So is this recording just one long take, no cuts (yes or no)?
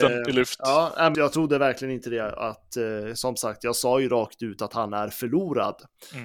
no